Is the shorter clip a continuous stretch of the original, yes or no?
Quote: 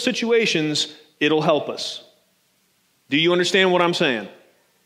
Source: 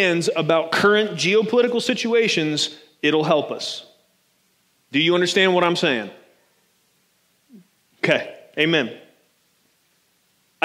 yes